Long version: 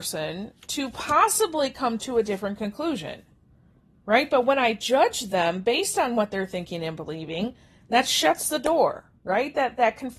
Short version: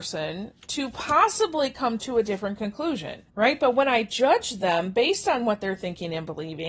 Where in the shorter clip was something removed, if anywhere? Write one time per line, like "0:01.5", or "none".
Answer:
0:03.3